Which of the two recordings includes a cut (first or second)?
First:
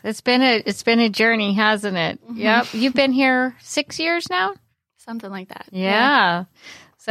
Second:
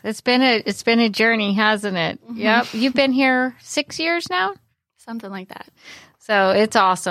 second